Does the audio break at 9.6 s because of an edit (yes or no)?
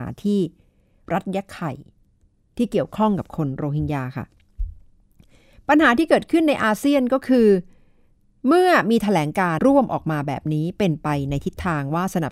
yes